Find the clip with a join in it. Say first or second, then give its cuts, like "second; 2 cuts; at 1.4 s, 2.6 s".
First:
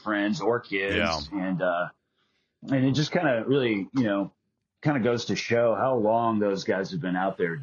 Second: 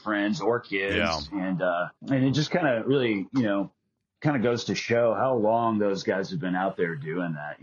second; 1 cut; at 2.0 s